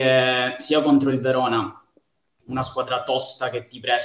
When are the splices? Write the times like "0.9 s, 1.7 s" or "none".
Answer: none